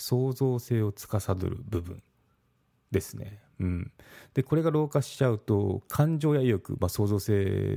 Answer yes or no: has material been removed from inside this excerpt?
no